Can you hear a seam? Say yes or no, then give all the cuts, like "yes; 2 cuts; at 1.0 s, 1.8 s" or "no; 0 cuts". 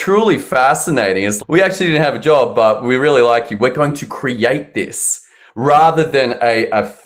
yes; 1 cut; at 1.4 s